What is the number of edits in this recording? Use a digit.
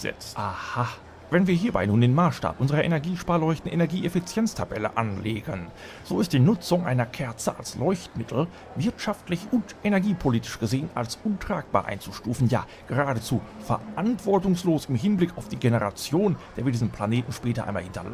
0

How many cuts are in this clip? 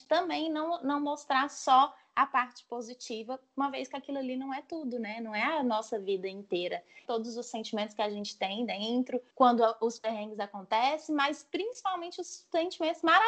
2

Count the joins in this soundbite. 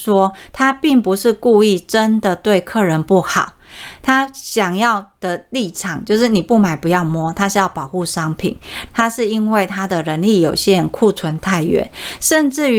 1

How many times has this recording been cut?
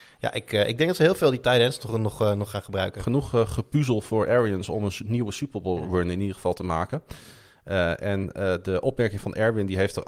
0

